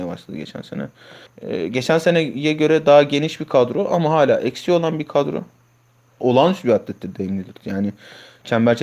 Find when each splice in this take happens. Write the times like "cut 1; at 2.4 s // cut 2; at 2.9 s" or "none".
cut 1; at 1.3 s // cut 2; at 6.2 s